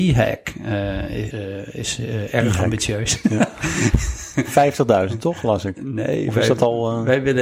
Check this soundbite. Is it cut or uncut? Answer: cut